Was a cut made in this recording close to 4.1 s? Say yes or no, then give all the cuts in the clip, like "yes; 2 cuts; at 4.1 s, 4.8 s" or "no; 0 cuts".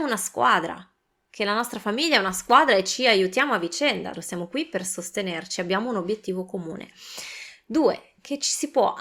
yes; 1 cut; at 4.1 s